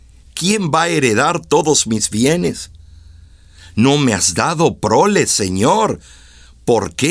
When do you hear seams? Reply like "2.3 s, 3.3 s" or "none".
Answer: none

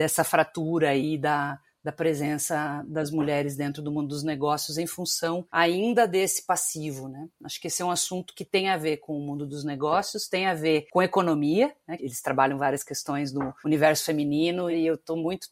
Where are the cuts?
12.0 s

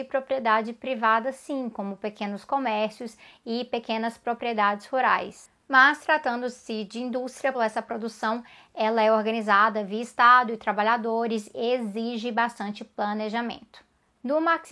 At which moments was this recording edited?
7.5 s

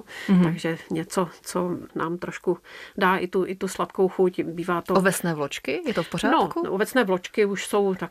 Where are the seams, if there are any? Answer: none

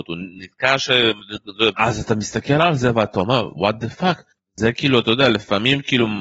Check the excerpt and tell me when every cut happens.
1.7 s

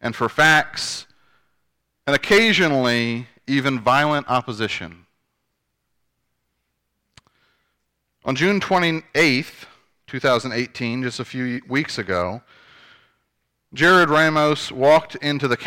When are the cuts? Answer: none

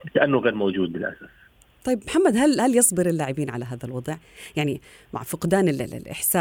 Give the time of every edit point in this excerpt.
none

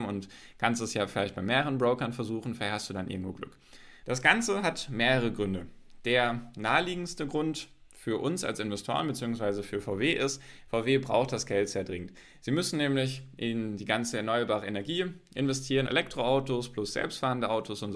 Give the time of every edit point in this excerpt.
4.0 s, 15.9 s

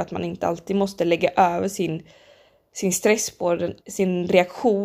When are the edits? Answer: 3.8 s

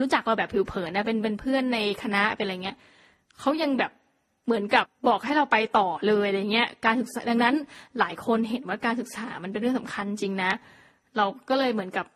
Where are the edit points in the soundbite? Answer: 4.8 s

